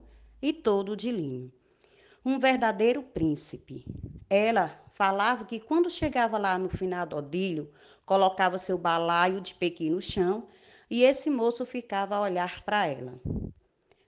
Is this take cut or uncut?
uncut